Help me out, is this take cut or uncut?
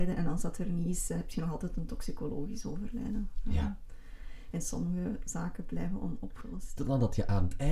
cut